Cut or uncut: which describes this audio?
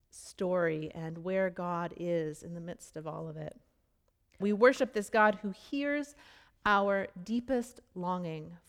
cut